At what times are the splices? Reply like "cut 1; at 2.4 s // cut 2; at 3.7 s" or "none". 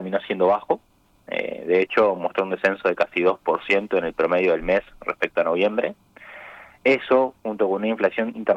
none